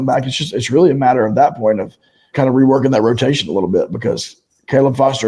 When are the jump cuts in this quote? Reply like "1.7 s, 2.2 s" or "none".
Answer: 2.3 s